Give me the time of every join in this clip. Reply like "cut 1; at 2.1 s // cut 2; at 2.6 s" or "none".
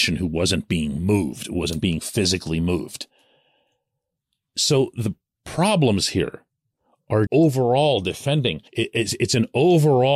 cut 1; at 7.3 s // cut 2; at 8.7 s